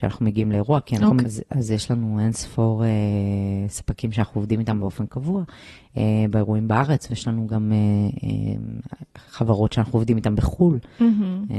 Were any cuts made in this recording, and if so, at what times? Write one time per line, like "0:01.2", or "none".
0:01.2

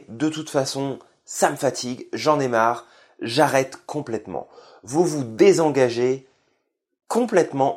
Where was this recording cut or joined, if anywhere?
none

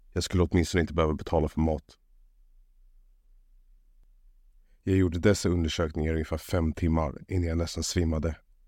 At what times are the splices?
none

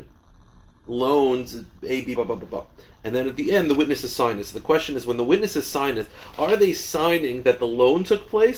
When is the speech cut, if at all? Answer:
0:02.2

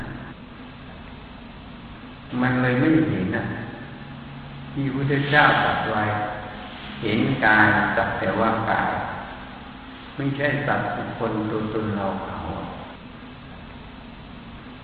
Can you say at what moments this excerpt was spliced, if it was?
0:03.3

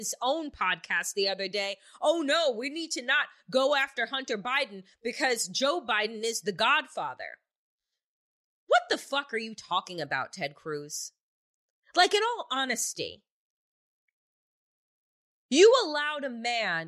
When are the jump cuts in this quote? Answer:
none

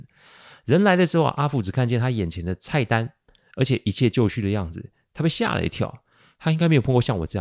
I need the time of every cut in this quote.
none

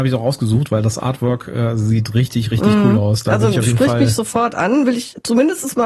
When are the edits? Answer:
none

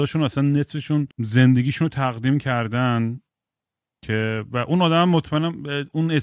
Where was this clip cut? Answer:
0:01.1

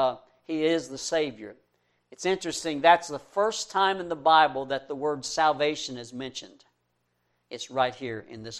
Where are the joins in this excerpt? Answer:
none

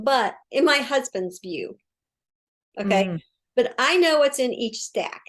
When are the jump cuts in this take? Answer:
none

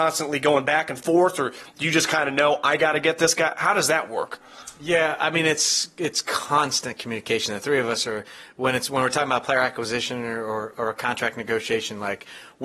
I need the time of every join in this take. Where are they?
none

